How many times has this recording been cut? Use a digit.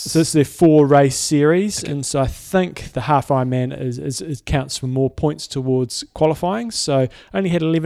1